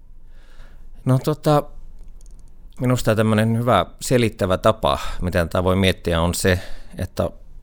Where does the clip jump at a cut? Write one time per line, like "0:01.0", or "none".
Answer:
0:01.0
0:02.8